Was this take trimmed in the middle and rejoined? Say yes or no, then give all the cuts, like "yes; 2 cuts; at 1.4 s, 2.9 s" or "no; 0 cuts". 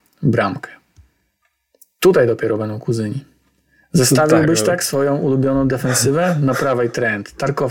no; 0 cuts